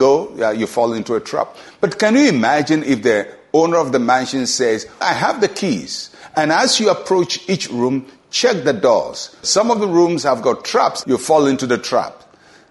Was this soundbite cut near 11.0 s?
yes; 3 cuts; at 5.0 s, 9.4 s, 11.0 s

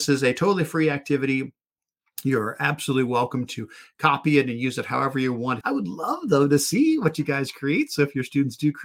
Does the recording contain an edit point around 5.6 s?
yes; 1 cut; at 5.6 s

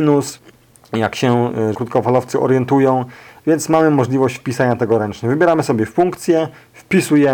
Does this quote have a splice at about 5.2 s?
no; 1 cut; at 1.7 s

